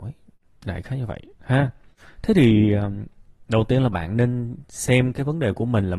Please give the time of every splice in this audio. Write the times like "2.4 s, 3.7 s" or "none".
1.3 s